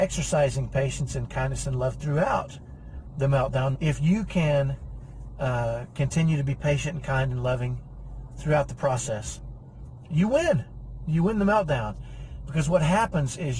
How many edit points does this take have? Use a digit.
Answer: 1